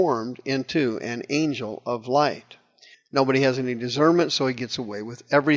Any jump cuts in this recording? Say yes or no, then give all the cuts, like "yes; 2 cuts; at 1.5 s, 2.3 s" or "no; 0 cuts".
yes; 1 cut; at 2.9 s